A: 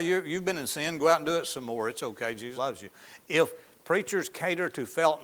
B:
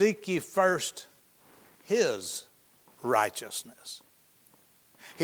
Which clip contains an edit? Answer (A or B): A